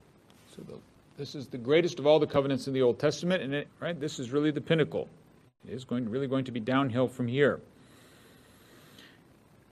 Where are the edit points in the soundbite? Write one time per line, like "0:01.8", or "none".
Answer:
0:03.7